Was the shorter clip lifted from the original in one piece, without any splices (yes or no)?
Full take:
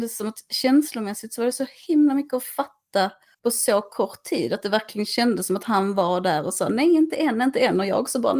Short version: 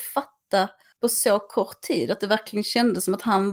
yes